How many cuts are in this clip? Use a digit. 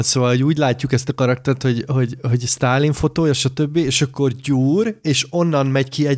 0